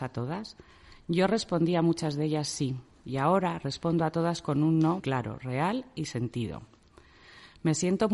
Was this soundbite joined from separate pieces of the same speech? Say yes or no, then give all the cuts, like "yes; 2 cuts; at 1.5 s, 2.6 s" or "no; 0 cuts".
yes; 1 cut; at 5.0 s